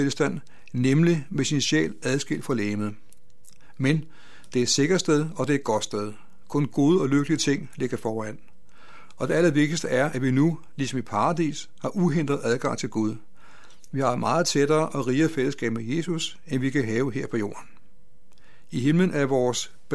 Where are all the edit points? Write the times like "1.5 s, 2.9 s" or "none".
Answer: none